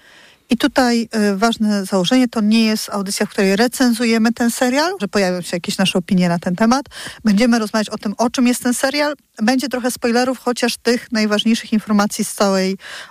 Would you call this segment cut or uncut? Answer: cut